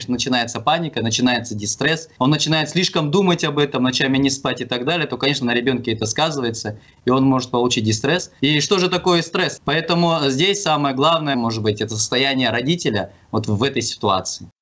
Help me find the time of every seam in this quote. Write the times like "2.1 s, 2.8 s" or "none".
8.4 s, 9.6 s, 11.3 s